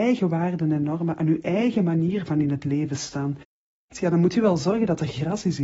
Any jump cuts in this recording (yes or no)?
yes